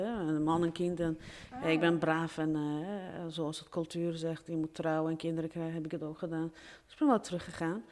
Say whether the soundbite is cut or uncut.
uncut